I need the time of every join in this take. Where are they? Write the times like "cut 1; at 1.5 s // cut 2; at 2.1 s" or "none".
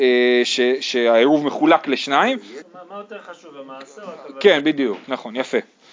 cut 1; at 2.6 s